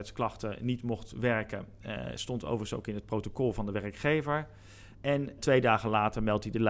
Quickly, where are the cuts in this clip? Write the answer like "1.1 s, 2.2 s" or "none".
4.9 s